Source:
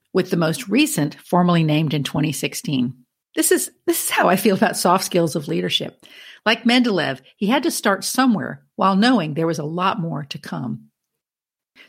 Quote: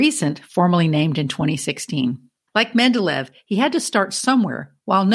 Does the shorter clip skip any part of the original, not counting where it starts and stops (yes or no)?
yes